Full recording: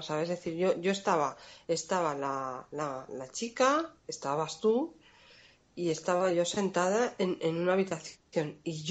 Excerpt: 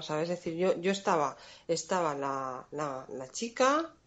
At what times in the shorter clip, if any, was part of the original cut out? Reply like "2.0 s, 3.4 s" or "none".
none